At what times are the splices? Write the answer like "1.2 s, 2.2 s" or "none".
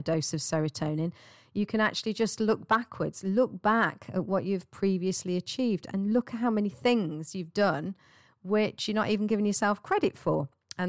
none